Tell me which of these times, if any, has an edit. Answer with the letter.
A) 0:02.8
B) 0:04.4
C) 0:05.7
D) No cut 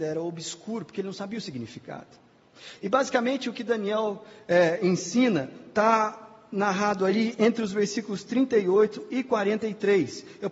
A